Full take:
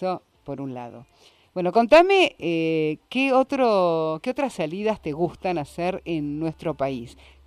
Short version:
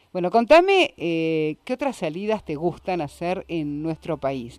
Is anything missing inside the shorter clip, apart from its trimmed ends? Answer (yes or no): yes